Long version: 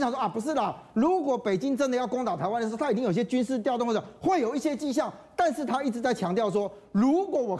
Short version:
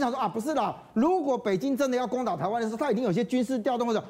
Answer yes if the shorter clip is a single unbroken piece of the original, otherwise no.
yes